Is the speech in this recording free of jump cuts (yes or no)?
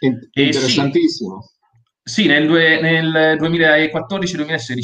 yes